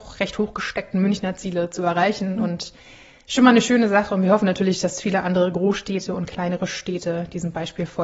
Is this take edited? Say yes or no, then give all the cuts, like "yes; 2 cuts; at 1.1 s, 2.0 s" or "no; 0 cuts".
no; 0 cuts